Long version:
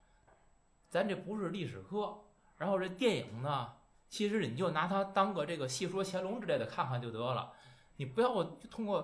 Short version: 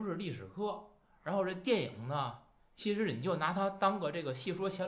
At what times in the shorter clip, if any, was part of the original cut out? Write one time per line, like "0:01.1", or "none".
none